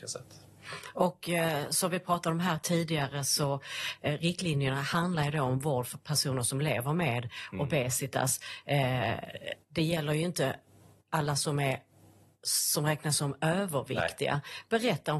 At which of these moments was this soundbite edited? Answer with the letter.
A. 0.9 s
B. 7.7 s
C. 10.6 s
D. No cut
D